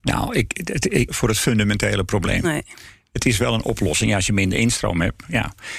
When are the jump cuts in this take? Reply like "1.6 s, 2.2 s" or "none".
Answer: 1.1 s